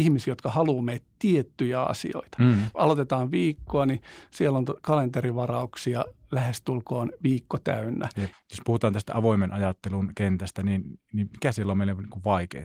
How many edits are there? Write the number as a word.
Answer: two